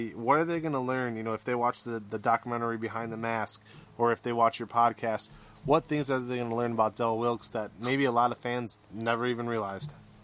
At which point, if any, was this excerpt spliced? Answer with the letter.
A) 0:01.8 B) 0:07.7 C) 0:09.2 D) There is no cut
D